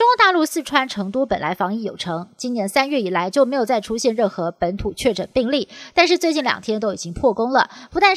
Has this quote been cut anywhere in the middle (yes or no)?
no